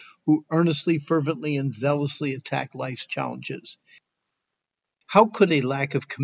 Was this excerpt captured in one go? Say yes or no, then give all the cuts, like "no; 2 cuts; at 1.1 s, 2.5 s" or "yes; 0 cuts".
no; 1 cut; at 5.0 s